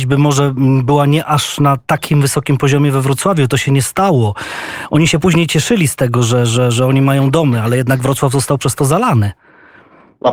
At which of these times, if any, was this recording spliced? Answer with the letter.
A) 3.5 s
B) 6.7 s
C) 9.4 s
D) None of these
D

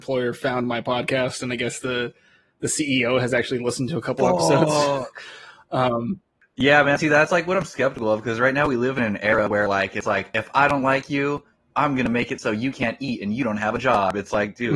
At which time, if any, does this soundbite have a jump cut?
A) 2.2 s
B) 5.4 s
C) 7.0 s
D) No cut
D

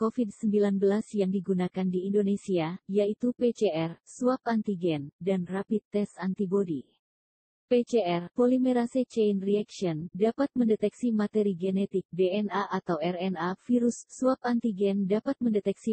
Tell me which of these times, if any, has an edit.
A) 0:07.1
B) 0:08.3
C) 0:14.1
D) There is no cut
D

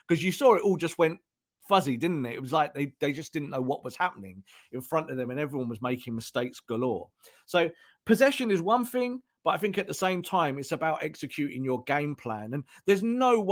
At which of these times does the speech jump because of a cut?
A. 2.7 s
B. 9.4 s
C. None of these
C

